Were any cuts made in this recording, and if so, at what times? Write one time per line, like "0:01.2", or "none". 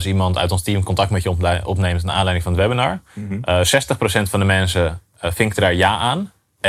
none